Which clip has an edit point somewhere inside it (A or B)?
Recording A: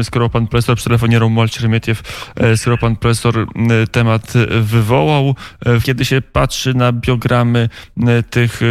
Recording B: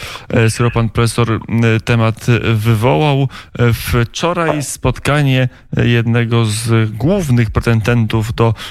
A